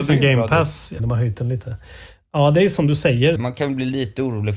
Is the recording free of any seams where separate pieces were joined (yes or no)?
no